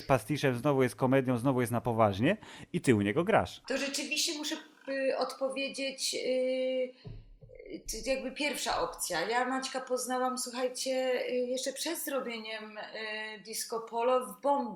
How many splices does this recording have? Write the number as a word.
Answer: zero